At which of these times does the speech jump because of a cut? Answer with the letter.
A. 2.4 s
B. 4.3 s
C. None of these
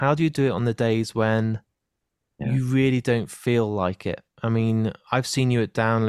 C